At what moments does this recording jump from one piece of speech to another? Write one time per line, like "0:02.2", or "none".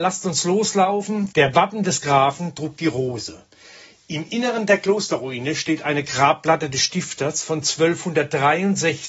0:01.3